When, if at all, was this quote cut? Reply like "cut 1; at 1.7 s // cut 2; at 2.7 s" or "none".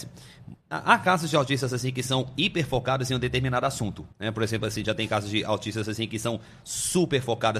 cut 1; at 4.1 s